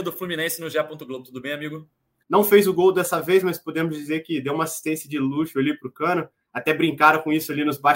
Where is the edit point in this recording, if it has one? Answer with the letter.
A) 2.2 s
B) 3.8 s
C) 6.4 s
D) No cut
A